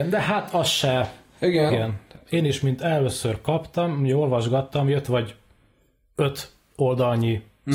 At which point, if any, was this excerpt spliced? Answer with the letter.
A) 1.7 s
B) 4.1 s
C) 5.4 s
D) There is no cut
A